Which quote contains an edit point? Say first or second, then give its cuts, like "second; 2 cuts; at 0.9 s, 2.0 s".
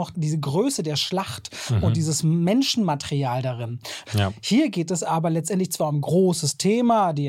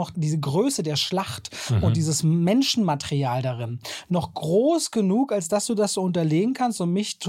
first; 1 cut; at 4.1 s